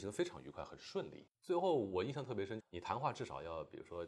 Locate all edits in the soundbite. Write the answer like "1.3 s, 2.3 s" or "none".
1.3 s, 2.6 s